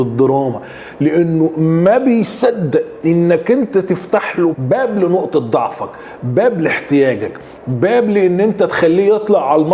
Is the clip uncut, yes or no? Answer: no